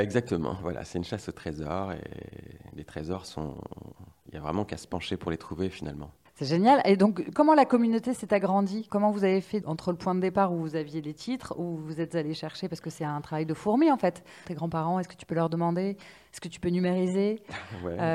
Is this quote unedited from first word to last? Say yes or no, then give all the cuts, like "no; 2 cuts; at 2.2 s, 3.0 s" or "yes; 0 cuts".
no; 2 cuts; at 8.9 s, 14.4 s